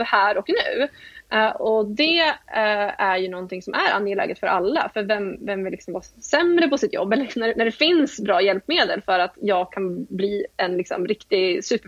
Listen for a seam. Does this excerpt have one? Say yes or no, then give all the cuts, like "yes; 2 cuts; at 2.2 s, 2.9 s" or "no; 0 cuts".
no; 0 cuts